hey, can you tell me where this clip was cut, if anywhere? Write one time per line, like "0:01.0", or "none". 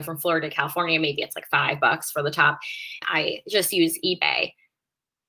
0:03.0